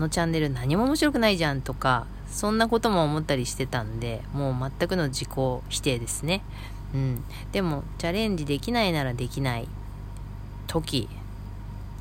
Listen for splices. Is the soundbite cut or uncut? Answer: uncut